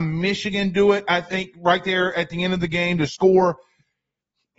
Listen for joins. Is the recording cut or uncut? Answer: uncut